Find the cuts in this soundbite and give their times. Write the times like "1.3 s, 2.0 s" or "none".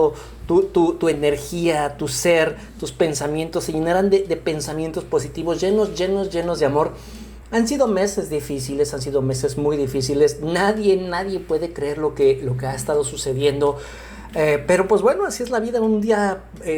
none